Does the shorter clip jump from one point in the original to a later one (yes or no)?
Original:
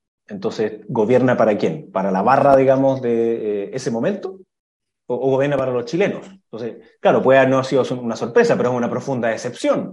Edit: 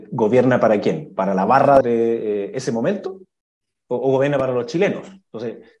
yes